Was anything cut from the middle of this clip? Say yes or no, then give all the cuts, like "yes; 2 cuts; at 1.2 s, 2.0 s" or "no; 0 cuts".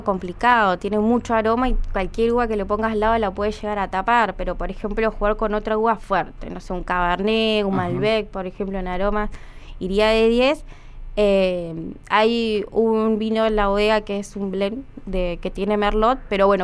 no; 0 cuts